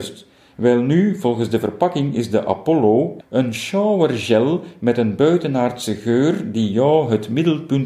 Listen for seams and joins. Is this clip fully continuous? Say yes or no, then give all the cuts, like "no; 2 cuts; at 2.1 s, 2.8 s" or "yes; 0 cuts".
no; 1 cut; at 3.2 s